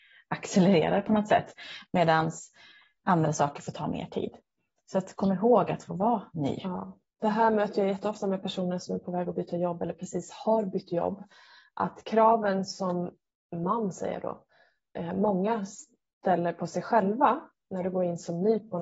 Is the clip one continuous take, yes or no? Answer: yes